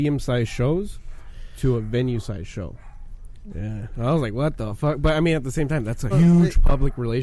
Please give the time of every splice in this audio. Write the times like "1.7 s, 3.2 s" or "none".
3.5 s, 6.1 s